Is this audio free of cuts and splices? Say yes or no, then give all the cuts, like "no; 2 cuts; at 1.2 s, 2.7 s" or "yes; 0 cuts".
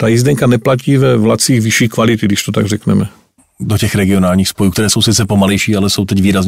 no; 1 cut; at 3.4 s